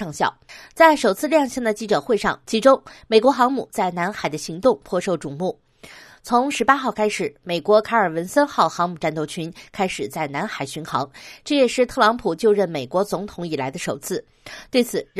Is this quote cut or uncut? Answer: cut